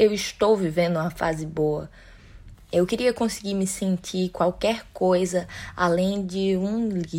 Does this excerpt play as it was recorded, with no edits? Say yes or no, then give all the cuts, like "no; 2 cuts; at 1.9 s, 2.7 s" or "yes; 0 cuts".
no; 1 cut; at 2.5 s